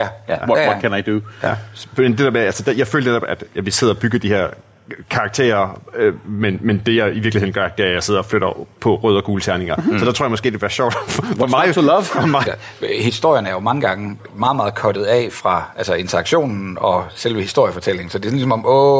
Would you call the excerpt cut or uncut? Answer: cut